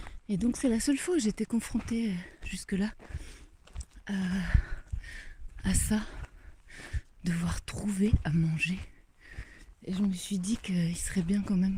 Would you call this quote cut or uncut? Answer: cut